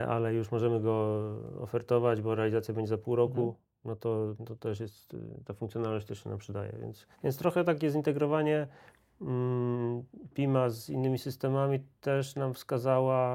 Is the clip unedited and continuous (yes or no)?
no